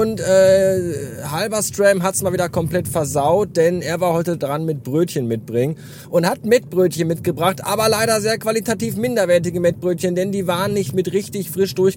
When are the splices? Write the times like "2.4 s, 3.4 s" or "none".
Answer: none

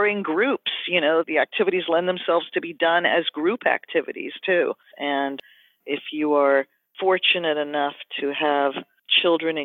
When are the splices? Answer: 1.2 s, 4.9 s

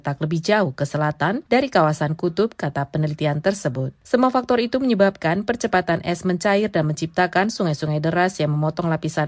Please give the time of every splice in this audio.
none

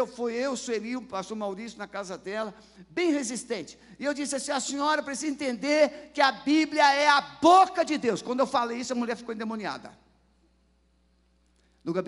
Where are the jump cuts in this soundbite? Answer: none

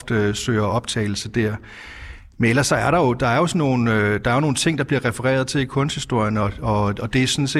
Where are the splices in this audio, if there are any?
none

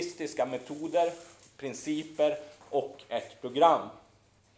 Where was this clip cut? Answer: none

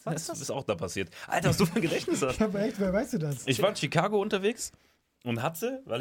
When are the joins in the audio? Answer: none

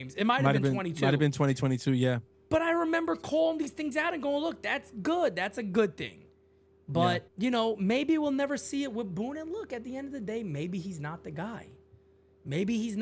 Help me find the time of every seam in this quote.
7.3 s

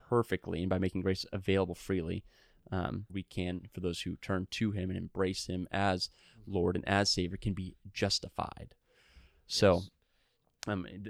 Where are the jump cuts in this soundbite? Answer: 3.1 s

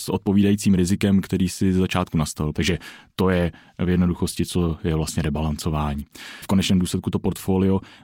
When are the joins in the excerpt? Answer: 2.5 s, 6.4 s

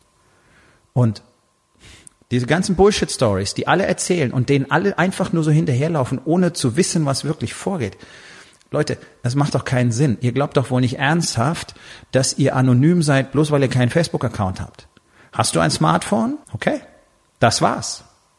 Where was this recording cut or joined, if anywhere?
16.4 s

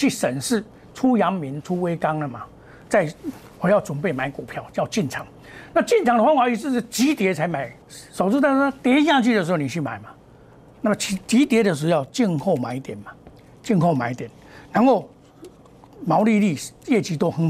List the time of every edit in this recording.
7.8 s

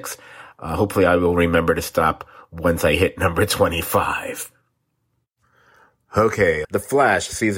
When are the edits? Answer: 6.6 s

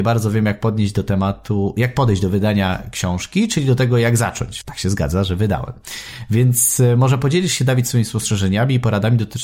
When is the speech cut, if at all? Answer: 4.6 s

